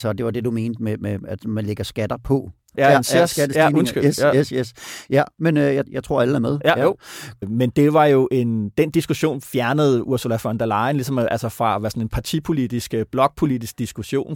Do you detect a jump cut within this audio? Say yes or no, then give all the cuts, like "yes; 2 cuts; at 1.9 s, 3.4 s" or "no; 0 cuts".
yes; 2 cuts; at 2.8 s, 7.4 s